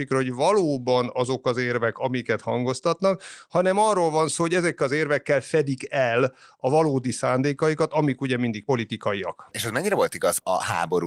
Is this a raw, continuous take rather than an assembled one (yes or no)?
yes